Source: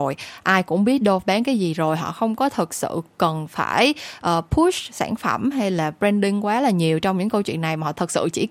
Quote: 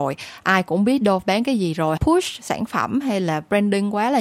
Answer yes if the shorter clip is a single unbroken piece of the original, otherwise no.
no